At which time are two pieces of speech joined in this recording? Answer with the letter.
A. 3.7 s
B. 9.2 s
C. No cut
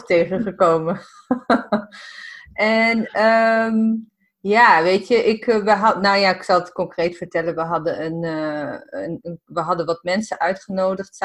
B